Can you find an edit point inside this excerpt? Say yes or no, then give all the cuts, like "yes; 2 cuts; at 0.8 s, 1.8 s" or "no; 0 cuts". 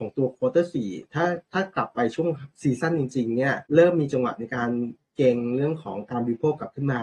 yes; 1 cut; at 3.7 s